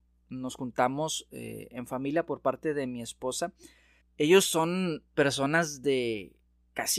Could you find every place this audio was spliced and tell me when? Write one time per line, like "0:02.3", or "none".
0:04.0